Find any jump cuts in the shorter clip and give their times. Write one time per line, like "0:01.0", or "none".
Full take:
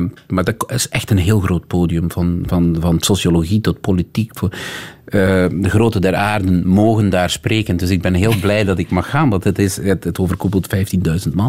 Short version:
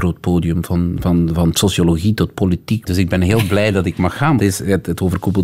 0:02.9
0:04.4